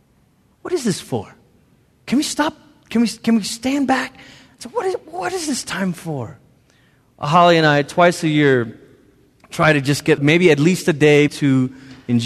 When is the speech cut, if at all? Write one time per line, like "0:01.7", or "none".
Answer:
0:10.2
0:11.3